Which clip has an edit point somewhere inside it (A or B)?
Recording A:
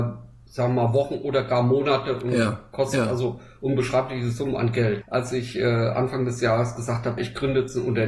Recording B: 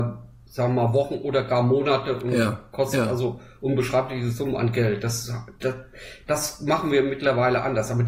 A